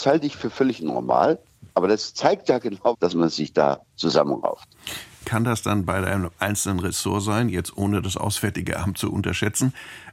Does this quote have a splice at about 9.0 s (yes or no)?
no